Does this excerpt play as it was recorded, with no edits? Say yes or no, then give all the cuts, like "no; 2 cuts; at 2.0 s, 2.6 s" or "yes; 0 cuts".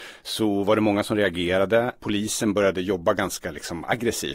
yes; 0 cuts